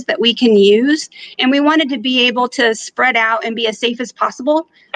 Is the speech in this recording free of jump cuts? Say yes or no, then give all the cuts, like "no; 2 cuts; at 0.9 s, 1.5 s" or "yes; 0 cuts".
yes; 0 cuts